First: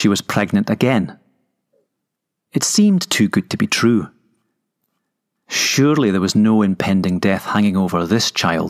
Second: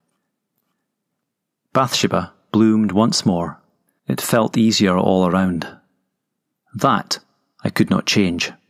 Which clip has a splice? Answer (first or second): second